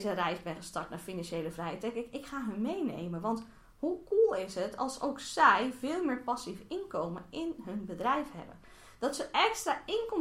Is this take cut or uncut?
uncut